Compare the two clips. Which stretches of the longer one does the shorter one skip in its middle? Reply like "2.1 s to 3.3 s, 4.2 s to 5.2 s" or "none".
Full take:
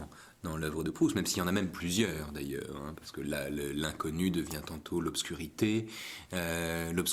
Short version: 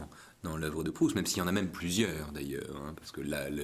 none

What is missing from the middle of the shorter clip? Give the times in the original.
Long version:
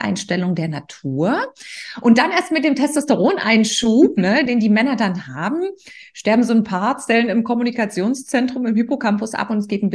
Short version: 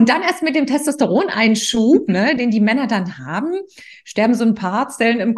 none

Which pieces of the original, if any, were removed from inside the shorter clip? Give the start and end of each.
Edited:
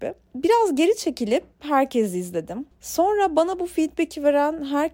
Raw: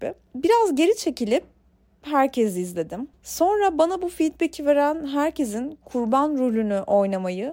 1.5 s to 2.0 s

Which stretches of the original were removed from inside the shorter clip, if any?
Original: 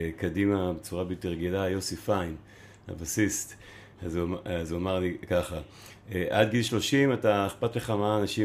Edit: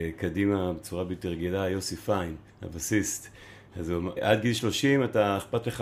2.5 s to 2.8 s, 4.4 s to 6.3 s

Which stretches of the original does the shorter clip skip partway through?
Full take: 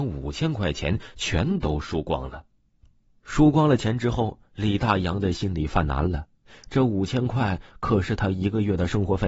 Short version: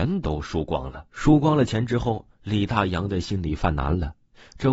2.5 s to 3.2 s

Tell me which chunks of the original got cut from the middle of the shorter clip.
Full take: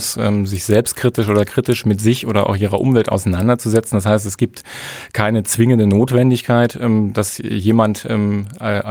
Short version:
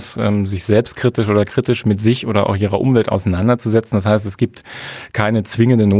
none

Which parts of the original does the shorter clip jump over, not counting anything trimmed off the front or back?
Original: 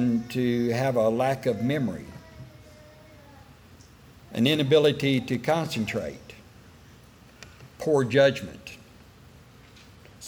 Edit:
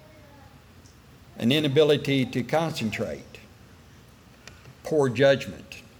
none

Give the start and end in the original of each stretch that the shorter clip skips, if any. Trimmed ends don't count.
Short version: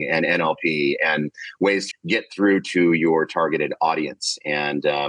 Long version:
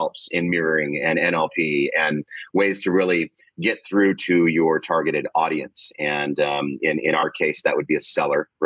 2.8 s to 3.4 s

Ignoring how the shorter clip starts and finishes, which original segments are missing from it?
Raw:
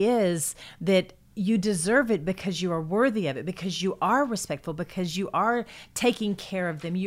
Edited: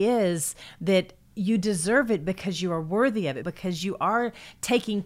3.4 s to 4.8 s

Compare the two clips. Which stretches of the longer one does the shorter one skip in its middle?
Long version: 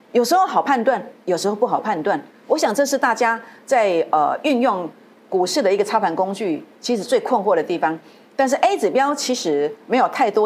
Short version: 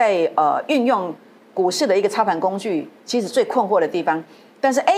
none

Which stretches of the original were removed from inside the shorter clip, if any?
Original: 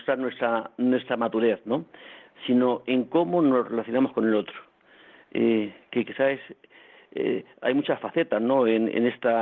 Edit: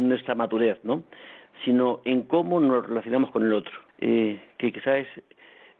4.7 s to 5.2 s

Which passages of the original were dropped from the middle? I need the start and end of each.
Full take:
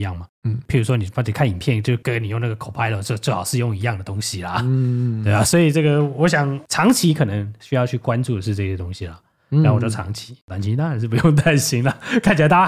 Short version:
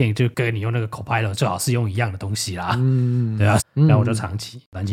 3.0 s to 3.2 s, 5.4 s to 9.3 s

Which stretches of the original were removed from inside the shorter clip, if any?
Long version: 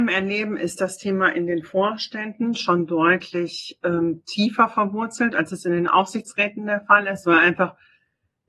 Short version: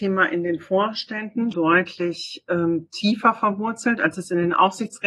2.6 s to 2.9 s

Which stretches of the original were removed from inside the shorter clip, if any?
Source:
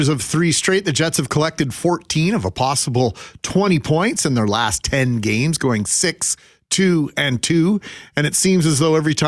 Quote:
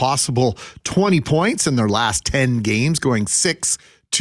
none

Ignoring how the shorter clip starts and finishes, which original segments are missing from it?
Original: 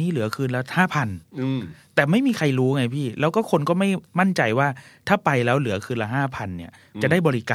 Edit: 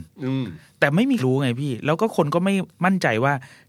2.3 s to 2.5 s

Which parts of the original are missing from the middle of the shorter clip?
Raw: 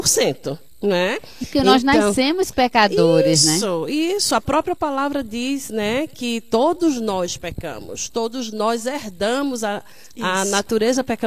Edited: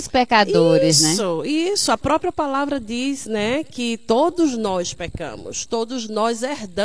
none

